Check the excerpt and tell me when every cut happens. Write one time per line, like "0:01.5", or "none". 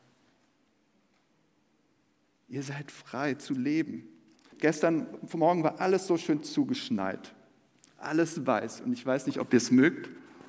0:04.5